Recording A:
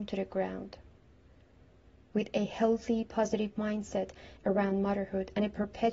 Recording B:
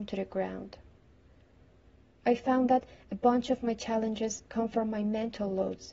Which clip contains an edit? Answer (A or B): A